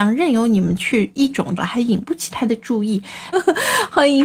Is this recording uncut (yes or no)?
no